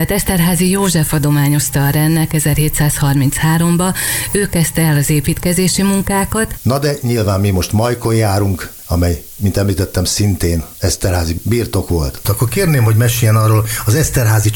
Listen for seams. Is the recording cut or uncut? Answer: cut